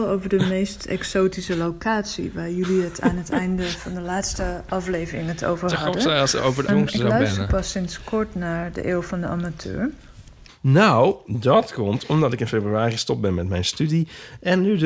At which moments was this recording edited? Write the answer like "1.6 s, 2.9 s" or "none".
6.7 s, 10.5 s

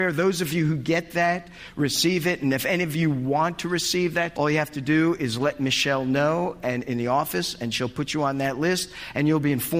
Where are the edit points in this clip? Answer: 4.3 s

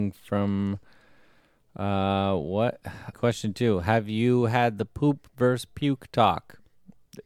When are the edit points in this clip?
3.1 s

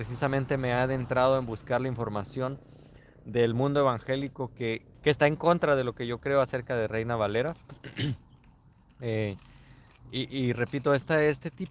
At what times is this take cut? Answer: 4.9 s

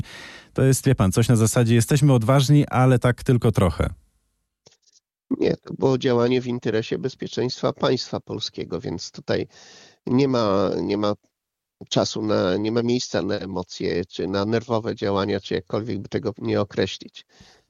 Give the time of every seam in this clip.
none

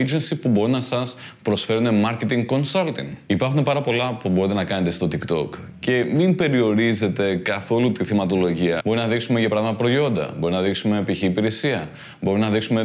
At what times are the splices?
8.8 s

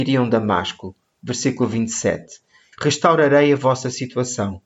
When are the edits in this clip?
2.7 s

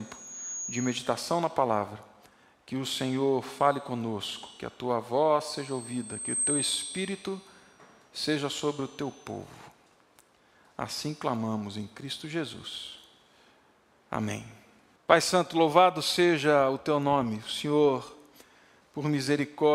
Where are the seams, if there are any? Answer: 15.0 s

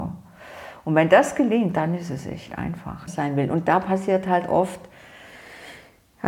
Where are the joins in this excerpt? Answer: 3.1 s

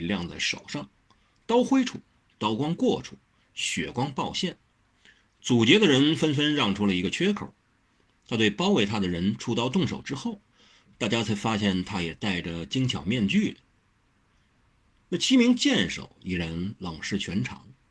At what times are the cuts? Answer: none

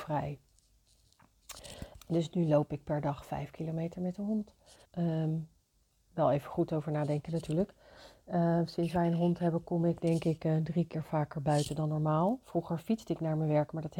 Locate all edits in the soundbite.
2.0 s, 4.8 s

